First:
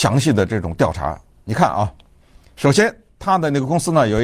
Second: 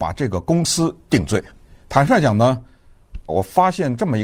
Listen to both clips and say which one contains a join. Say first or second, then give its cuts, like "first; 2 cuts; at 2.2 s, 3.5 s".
second; 2 cuts; at 1.8 s, 3.3 s